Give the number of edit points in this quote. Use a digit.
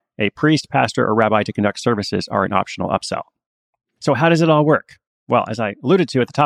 0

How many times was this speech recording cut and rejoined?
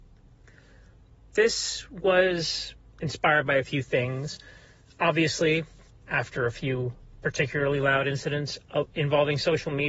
1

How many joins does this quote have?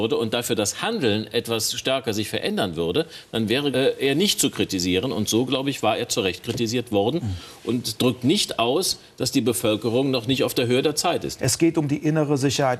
2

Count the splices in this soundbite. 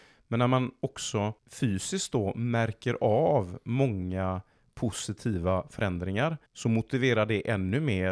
2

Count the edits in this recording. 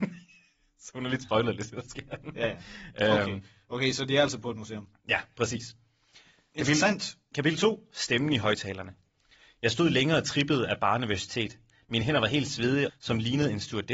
1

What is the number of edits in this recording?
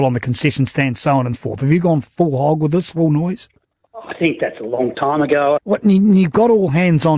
2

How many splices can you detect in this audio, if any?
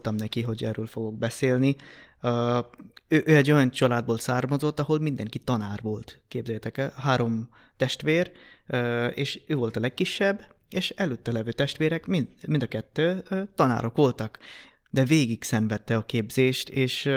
1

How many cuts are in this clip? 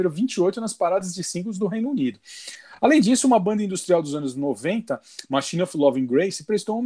0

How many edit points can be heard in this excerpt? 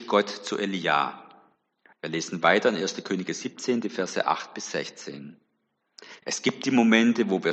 2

